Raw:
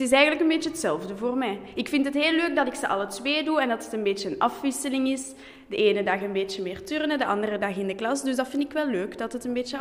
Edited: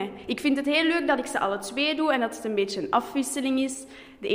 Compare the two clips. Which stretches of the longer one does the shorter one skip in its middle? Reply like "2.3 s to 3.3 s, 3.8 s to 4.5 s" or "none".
none